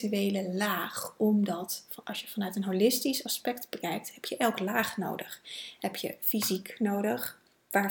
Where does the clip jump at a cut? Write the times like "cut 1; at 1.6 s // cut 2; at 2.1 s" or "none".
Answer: none